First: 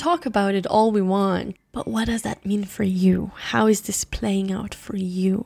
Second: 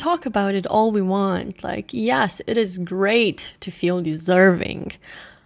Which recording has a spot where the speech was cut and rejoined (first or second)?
first